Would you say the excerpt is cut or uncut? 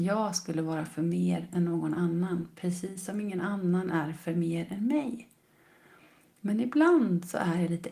uncut